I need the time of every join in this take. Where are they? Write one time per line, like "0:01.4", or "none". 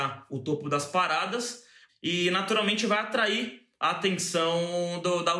0:01.9